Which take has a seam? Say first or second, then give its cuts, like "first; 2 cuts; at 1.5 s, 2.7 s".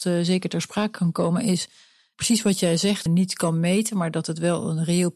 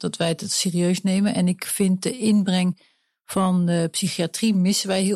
first; 1 cut; at 3.1 s